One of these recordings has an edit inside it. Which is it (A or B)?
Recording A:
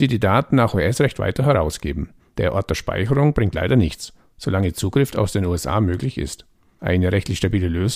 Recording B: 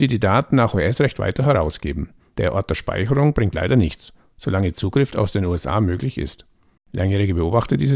B